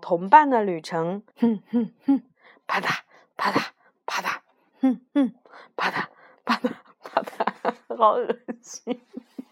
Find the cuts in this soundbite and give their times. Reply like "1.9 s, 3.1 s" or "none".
1.3 s, 4.7 s